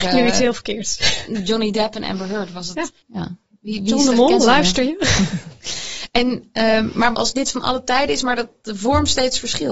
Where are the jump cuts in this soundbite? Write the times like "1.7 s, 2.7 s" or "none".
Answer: 3.0 s, 7.1 s